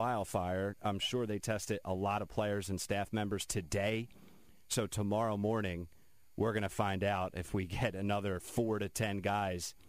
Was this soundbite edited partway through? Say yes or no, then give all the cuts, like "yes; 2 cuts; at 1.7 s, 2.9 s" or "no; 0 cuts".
no; 0 cuts